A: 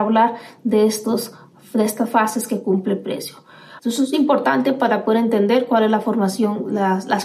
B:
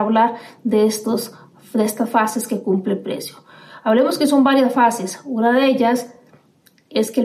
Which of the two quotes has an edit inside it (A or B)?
A